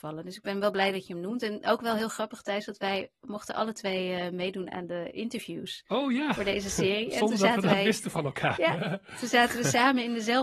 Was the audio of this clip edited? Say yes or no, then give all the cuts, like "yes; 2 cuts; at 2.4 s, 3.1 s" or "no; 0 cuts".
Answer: no; 0 cuts